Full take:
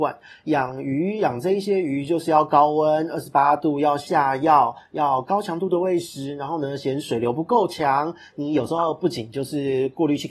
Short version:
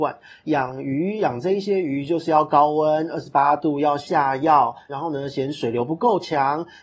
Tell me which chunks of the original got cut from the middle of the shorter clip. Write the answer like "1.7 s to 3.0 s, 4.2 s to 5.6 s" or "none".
4.9 s to 6.4 s